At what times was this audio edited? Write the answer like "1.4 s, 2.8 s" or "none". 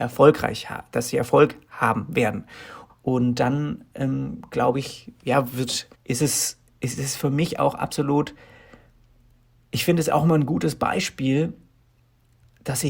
2.9 s, 5.9 s